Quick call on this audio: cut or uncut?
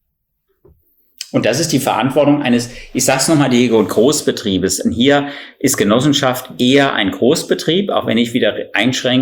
uncut